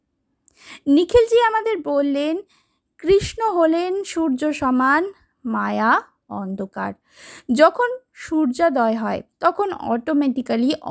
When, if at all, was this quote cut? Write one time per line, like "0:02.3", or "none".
0:09.3

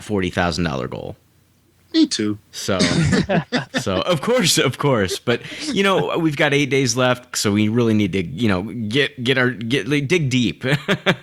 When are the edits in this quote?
0:07.3

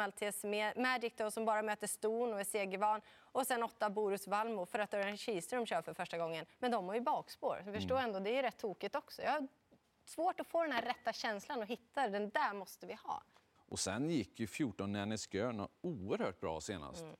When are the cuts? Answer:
0:13.6

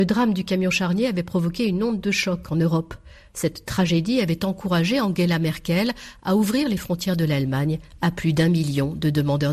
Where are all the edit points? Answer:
none

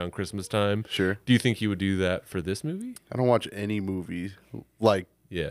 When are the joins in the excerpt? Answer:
none

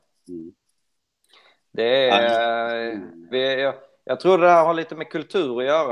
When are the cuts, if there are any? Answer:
0:03.3

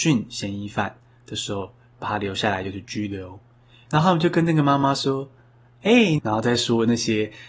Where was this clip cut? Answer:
0:03.9
0:06.2

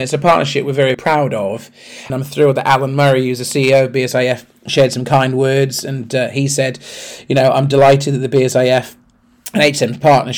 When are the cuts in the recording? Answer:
0:00.9
0:02.1

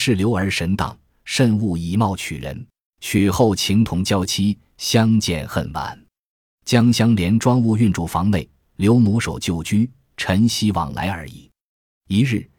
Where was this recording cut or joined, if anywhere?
0:02.9

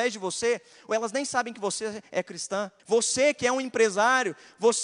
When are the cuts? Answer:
0:02.8

